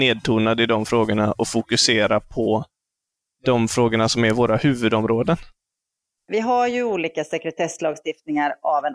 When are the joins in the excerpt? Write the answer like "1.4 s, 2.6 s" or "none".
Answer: 6.2 s